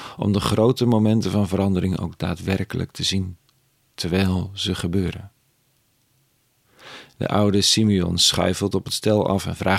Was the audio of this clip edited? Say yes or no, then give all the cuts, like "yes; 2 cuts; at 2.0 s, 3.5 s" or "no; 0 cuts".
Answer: no; 0 cuts